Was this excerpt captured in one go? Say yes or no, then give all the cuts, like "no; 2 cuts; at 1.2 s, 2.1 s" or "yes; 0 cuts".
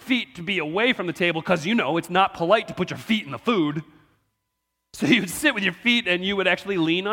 yes; 0 cuts